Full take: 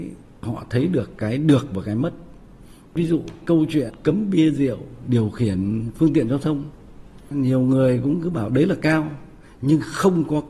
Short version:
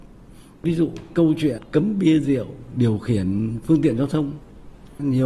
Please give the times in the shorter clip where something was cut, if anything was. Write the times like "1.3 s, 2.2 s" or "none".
none